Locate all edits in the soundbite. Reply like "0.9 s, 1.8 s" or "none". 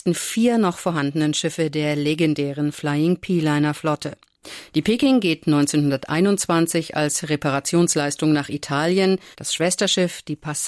4.7 s, 9.3 s